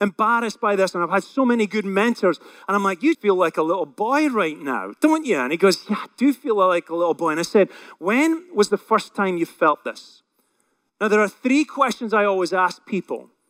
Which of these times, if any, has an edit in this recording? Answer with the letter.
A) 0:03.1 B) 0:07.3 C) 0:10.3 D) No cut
A